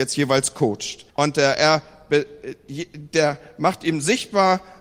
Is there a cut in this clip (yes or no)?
yes